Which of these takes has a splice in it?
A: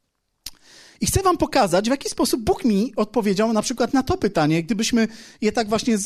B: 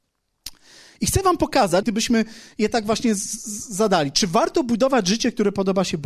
B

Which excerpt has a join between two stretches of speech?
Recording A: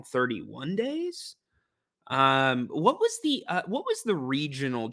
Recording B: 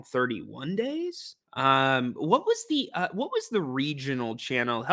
B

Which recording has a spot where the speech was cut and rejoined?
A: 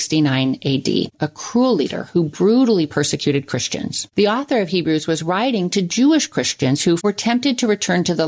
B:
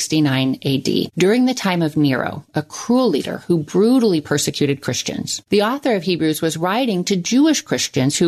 A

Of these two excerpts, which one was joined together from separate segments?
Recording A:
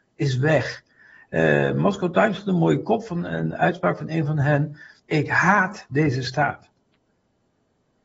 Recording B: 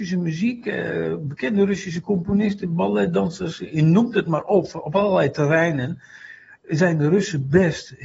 A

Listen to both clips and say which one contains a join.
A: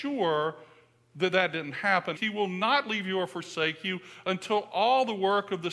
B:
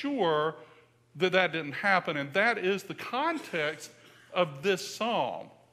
A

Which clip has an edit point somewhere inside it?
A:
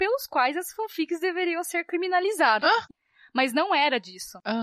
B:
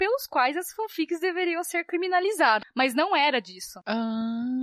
B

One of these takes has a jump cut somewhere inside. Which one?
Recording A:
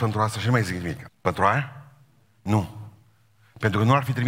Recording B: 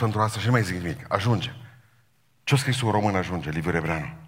A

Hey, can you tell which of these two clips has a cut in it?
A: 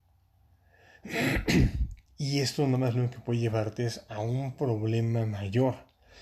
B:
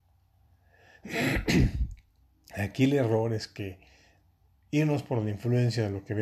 A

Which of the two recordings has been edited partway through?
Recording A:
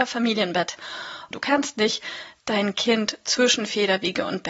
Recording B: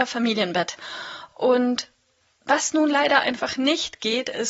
A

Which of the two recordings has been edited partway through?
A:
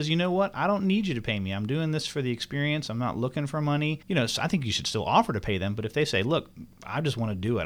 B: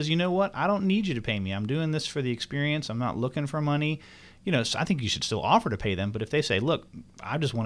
A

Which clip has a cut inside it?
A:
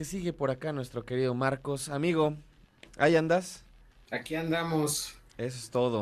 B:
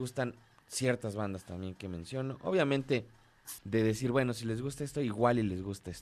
B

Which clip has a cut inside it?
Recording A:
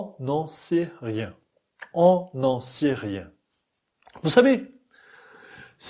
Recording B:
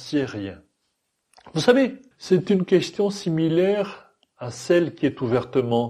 B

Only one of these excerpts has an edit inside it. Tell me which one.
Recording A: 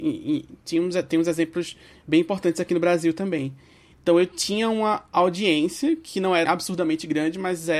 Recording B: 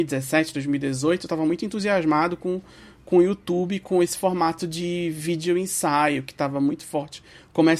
A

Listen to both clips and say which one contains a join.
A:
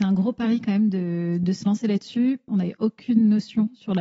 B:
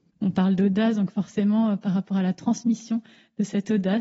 A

